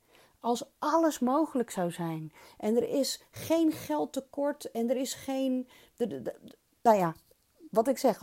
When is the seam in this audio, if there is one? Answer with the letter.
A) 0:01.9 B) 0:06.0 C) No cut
C